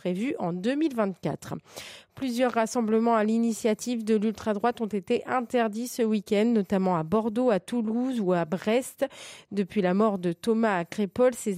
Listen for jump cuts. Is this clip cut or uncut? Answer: uncut